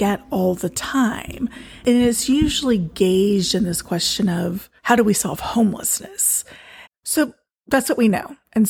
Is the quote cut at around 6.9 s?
yes; 2 cuts; at 4.8 s, 6.9 s

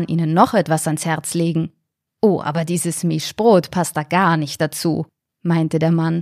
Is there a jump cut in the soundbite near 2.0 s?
yes; 1 cut; at 2.0 s

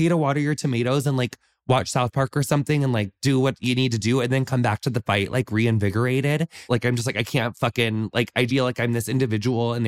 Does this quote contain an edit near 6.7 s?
yes; 2 cuts; at 6.7 s, 8.5 s

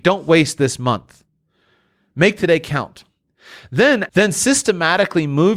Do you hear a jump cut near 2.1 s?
no; 1 cut; at 4.1 s

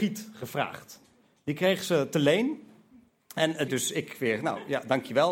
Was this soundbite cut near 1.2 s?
no; 1 cut; at 3.7 s

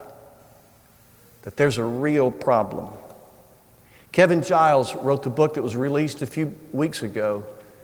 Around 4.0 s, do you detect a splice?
no; 1 cut; at 6.2 s

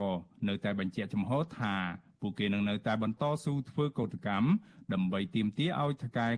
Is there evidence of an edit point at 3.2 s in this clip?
yes; 1 cut; at 3.2 s

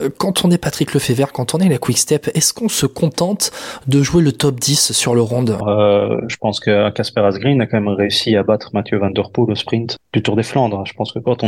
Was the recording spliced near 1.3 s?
no; 2 cuts; at 5.6 s, 10.0 s

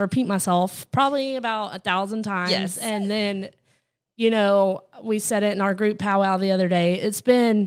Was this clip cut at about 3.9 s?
no; 0 cuts

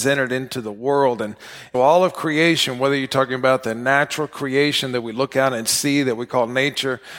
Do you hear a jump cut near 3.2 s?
no; 1 cut; at 1.7 s

